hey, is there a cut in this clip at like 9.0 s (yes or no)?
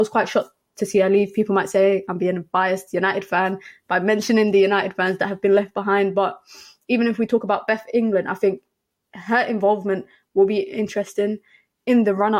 no